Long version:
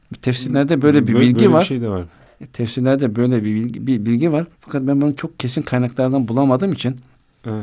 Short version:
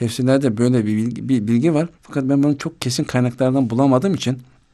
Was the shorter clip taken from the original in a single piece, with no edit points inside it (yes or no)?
yes